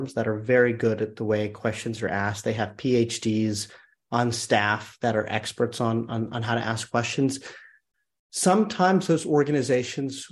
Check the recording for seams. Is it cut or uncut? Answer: uncut